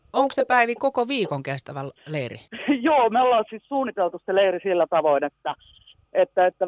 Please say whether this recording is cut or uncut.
cut